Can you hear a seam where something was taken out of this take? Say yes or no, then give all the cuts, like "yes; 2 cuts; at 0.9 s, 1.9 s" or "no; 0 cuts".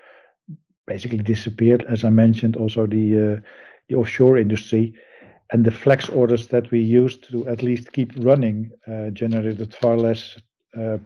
yes; 1 cut; at 1.8 s